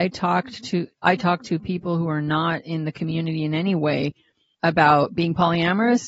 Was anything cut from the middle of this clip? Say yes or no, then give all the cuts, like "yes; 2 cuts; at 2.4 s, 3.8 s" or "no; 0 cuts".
yes; 1 cut; at 4.5 s